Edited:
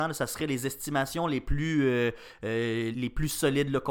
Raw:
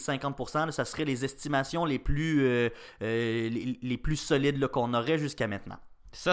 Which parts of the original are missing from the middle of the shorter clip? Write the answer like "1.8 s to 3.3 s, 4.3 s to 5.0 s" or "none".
3.5 s to 3.8 s